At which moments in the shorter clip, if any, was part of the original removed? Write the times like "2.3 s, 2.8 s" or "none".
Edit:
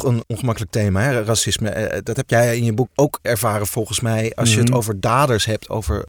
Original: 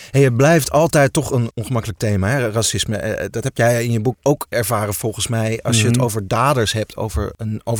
none